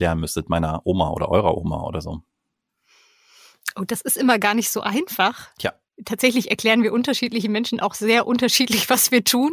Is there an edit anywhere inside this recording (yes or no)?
no